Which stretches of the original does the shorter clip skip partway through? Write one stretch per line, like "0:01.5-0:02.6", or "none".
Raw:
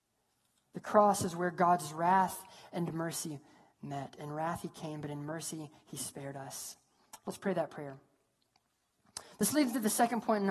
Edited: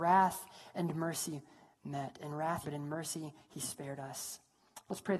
0:04.6-0:05.0